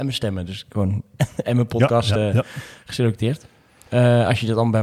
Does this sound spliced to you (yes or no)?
no